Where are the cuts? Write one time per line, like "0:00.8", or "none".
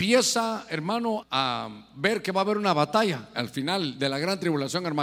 0:01.2